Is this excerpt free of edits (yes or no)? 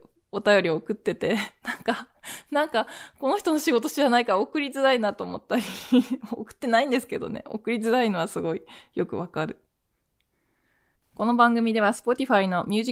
no